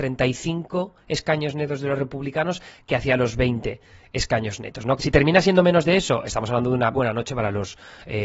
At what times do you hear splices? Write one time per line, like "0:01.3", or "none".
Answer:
0:05.0
0:06.9